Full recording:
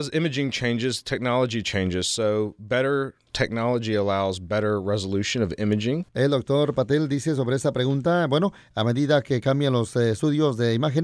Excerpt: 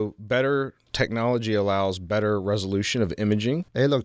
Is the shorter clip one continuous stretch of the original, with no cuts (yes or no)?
yes